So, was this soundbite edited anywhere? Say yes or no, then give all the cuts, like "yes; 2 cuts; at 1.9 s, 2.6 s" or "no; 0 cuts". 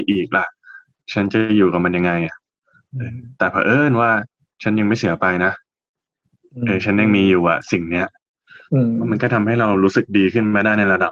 no; 0 cuts